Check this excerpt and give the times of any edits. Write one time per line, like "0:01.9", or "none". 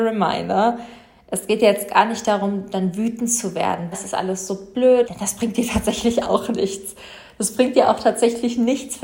0:03.9
0:05.0